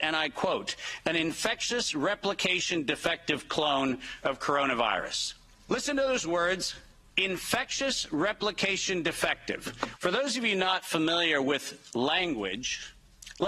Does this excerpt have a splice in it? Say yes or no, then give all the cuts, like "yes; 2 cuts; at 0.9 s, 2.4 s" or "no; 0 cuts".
yes; 1 cut; at 10.0 s